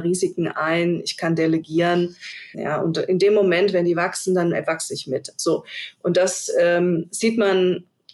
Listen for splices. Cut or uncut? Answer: cut